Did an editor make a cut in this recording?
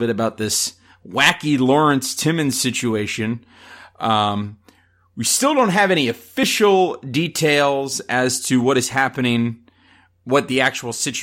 no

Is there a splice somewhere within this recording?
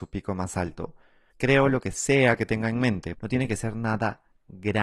yes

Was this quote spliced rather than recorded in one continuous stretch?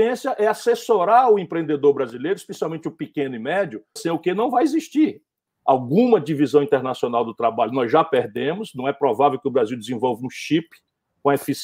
yes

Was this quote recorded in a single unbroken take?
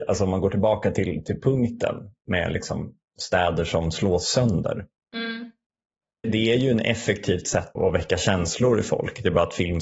no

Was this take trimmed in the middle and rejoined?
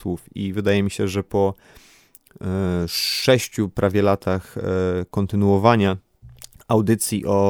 no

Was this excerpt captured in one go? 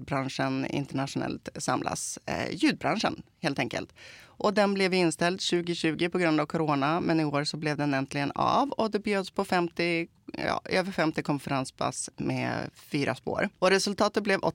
no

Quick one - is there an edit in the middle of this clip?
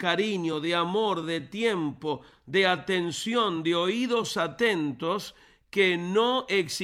no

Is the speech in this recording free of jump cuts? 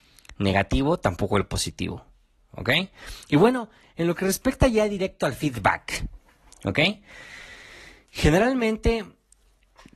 yes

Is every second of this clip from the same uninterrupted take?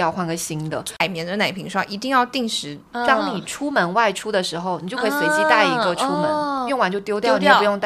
no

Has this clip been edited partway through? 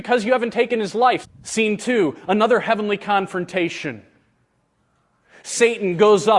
yes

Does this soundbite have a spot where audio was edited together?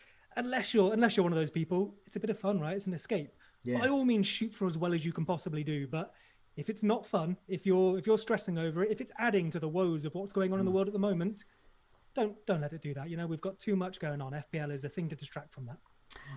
no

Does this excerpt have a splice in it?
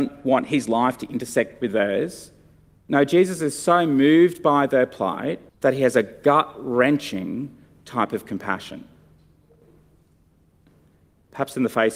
yes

